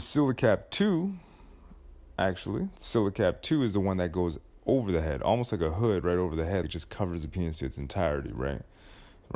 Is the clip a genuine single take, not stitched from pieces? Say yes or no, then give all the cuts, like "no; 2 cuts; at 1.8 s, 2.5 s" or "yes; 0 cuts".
no; 1 cut; at 6.6 s